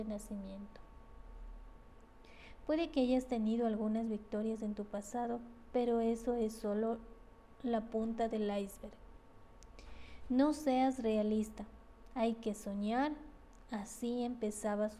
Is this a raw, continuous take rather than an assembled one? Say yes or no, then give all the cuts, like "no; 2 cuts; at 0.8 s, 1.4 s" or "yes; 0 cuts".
yes; 0 cuts